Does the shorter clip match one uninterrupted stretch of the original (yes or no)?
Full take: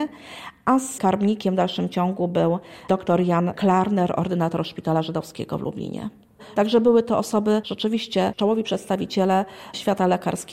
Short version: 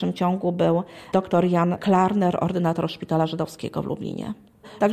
yes